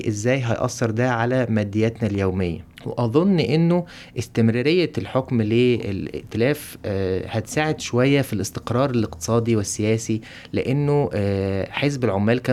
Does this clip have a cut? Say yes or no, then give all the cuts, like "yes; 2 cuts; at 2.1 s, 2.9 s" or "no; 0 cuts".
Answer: yes; 1 cut; at 2.7 s